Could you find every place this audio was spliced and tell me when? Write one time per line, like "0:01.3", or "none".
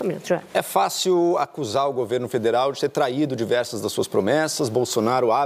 none